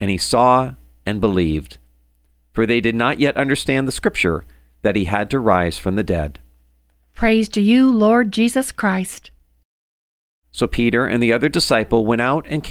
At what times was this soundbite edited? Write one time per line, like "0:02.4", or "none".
0:07.1
0:10.4